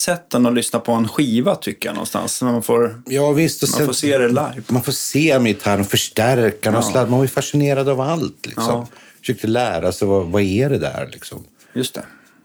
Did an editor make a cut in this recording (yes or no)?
no